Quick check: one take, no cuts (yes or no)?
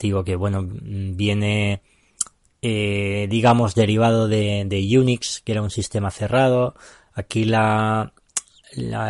yes